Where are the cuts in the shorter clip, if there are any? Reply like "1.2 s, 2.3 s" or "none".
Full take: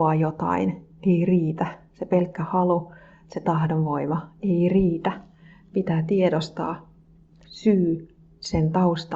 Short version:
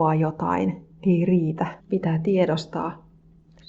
1.8 s